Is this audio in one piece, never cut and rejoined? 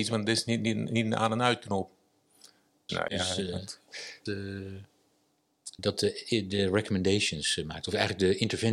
no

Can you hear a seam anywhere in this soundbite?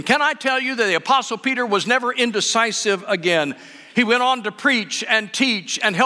no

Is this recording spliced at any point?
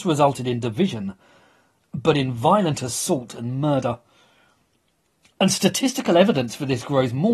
no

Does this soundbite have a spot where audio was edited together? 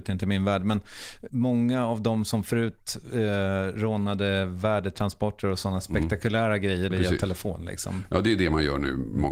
yes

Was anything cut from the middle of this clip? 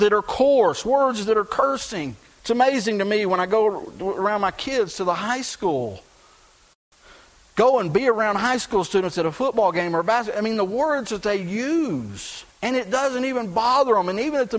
yes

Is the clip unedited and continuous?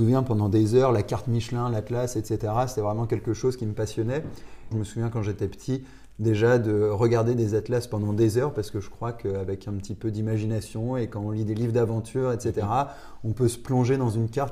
no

